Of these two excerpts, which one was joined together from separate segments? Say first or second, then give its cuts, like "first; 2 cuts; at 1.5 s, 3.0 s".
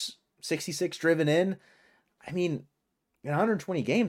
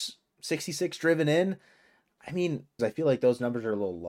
second; 1 cut; at 2.8 s